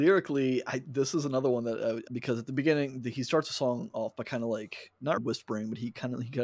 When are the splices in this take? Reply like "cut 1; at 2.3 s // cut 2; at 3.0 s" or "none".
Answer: cut 1; at 2.1 s // cut 2; at 5.2 s

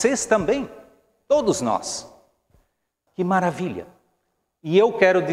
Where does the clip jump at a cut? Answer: cut 1; at 3.1 s

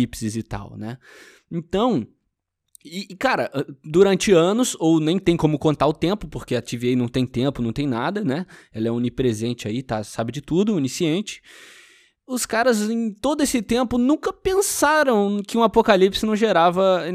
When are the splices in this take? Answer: none

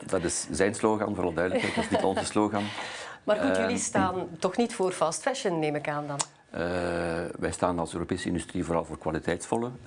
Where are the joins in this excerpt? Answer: none

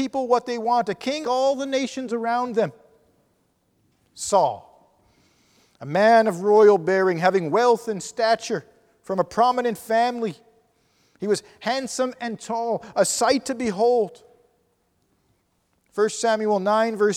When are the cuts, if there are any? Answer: cut 1; at 1.2 s

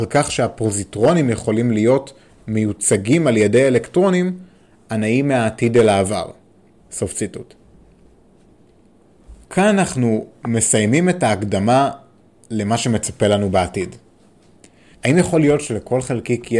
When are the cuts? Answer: cut 1; at 6.8 s // cut 2; at 9.4 s // cut 3; at 14.9 s

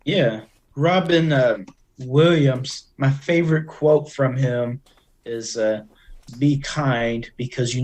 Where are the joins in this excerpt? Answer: cut 1; at 6.3 s

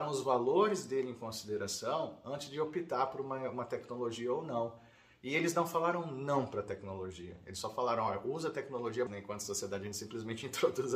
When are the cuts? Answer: cut 1; at 9.1 s

